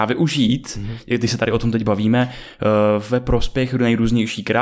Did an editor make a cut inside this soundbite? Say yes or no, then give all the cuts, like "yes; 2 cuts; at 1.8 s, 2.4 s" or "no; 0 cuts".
no; 0 cuts